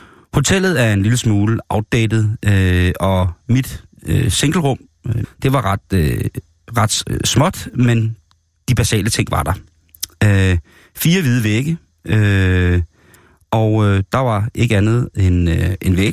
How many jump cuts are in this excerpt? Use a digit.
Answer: 1